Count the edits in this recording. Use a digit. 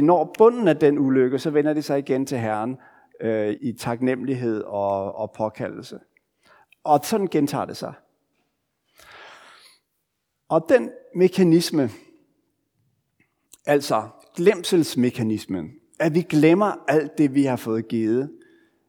1